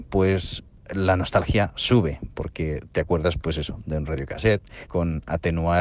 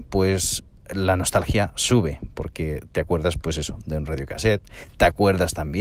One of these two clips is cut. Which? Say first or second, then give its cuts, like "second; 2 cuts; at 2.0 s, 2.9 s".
first; 1 cut; at 4.9 s